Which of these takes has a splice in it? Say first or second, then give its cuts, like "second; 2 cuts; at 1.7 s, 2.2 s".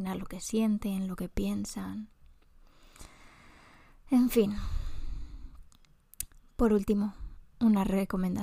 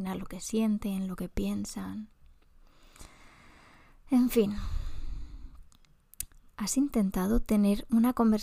second; 1 cut; at 6.5 s